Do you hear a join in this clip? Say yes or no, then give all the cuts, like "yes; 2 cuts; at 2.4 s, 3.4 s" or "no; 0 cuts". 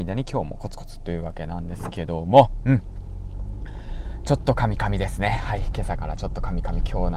no; 0 cuts